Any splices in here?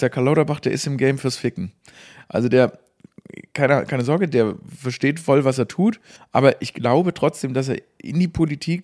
yes; 1 cut; at 6.2 s

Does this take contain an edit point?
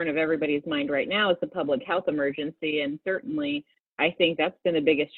no; 0 cuts

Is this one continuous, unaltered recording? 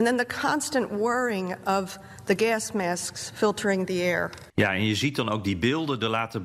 no; 1 cut; at 4.5 s

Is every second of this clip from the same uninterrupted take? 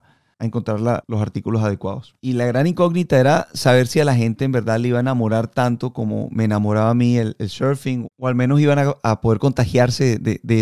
no; 1 cut; at 2.2 s

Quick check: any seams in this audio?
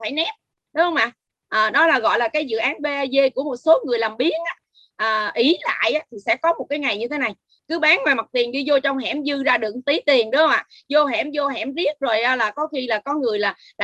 no; 0 cuts

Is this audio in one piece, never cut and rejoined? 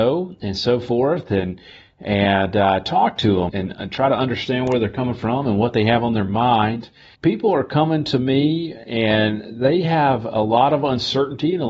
no; 2 cuts; at 3.5 s, 7.1 s

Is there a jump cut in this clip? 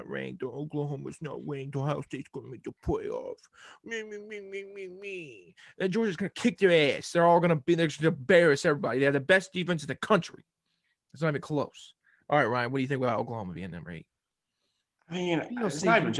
no; 0 cuts

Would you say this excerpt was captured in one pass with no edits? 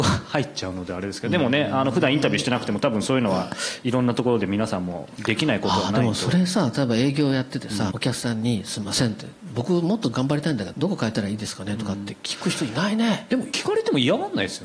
no; 2 cuts; at 7.9 s, 10.7 s

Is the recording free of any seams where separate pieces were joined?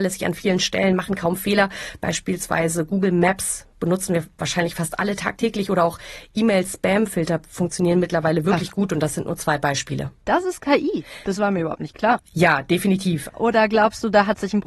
no; 2 cuts; at 12.2 s, 13.3 s

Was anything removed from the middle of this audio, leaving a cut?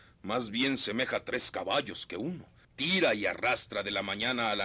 yes; 1 cut; at 2.6 s

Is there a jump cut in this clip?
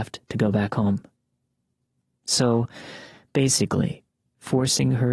yes; 1 cut; at 4.2 s

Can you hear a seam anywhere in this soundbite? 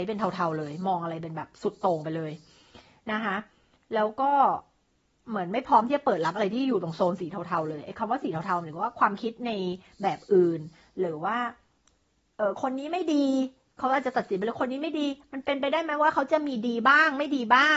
no; 0 cuts

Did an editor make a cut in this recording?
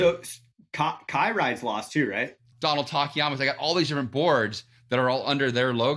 yes; 1 cut; at 2.5 s

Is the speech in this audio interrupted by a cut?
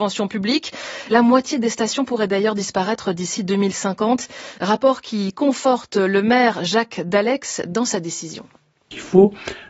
no; 0 cuts

